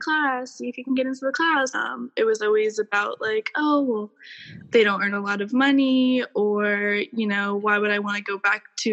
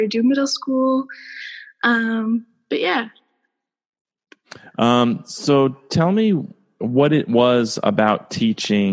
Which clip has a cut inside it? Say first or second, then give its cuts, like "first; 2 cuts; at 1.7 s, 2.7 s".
first; 1 cut; at 1.7 s